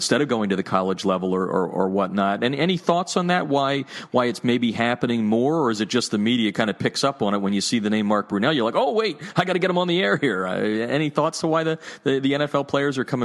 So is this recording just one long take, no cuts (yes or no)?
yes